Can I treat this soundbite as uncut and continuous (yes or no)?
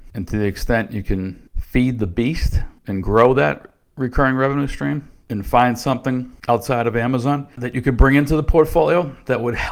no